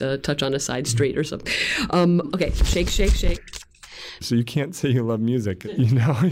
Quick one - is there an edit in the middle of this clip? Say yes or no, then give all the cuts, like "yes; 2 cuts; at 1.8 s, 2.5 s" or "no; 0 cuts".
yes; 1 cut; at 4.2 s